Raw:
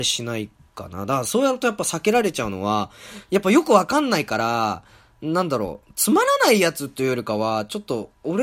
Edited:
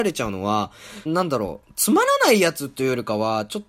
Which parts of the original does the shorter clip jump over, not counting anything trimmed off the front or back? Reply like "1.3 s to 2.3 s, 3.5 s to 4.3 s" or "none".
3.2 s to 5.2 s